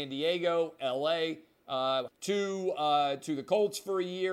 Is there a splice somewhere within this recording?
yes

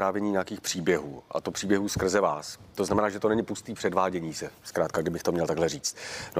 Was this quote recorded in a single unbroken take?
yes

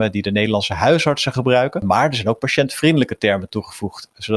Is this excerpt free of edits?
yes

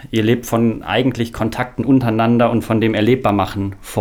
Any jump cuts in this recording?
no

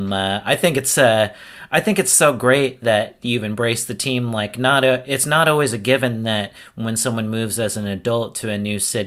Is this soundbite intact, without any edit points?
yes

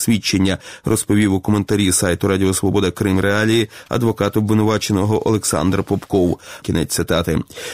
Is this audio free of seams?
no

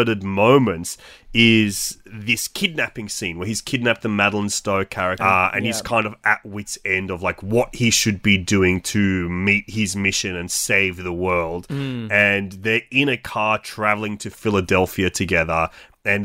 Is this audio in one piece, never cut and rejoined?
no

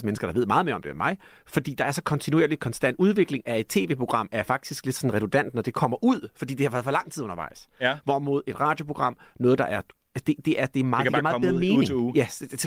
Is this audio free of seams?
yes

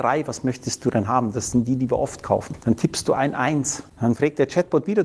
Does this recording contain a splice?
no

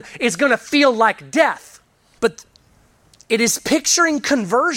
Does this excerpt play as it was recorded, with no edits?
no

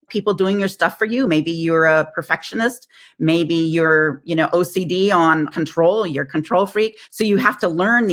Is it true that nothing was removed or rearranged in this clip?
yes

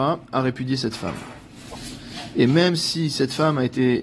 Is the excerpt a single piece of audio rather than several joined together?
yes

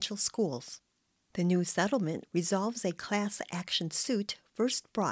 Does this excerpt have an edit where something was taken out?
yes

